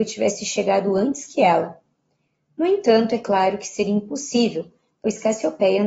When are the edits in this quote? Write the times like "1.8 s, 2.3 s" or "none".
none